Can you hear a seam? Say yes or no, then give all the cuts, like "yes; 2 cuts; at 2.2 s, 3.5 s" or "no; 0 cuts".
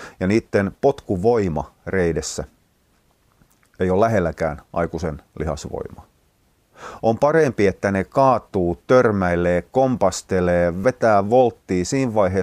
no; 0 cuts